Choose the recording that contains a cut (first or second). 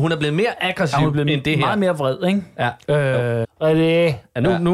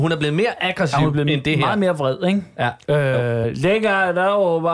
first